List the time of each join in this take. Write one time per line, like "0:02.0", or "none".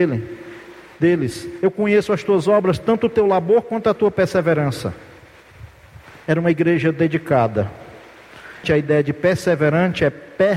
0:08.6